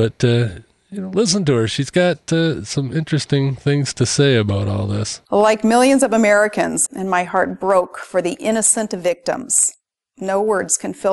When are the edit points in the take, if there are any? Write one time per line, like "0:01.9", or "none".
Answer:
0:05.3
0:06.9